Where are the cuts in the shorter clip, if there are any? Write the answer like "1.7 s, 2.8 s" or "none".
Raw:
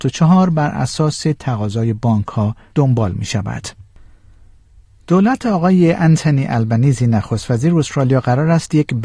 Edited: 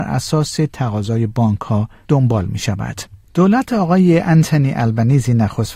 3.2 s